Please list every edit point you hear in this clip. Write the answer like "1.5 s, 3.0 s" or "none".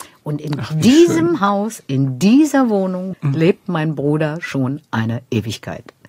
3.1 s